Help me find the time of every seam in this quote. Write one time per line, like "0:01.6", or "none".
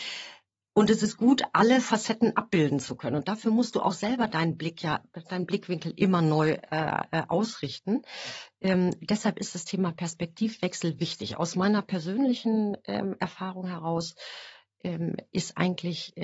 none